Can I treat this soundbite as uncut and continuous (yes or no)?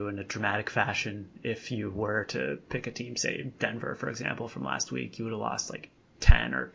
yes